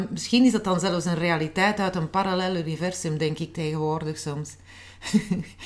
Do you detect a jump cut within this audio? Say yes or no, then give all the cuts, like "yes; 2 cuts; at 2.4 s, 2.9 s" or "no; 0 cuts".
no; 0 cuts